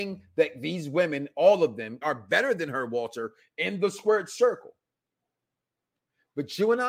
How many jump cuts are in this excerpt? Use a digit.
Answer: 1